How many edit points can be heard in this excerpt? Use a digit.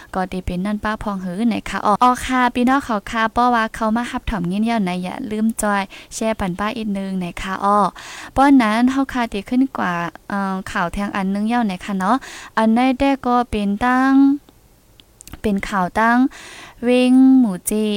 1